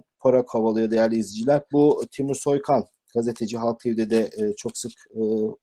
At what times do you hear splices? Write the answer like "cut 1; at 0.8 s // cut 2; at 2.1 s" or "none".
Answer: cut 1; at 1.7 s